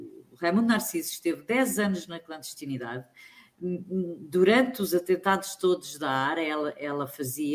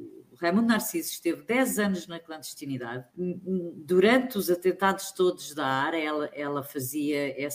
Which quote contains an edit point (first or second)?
second